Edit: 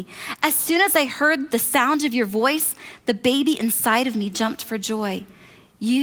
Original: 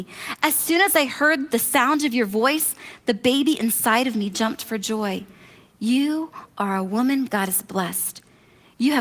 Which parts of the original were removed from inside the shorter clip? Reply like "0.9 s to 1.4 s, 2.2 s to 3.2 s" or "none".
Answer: none